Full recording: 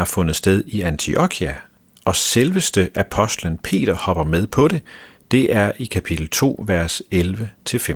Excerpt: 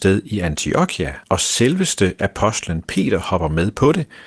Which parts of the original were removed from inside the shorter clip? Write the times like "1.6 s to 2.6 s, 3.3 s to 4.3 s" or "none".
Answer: 1.6 s to 2.0 s